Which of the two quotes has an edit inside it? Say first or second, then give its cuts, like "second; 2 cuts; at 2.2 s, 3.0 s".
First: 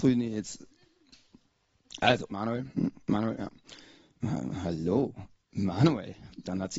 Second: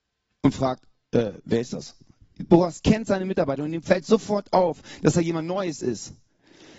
first; 1 cut; at 2.3 s